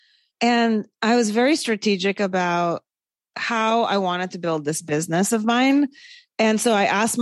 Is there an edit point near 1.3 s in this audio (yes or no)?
no